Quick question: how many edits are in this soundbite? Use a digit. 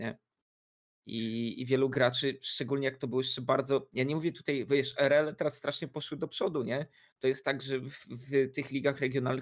0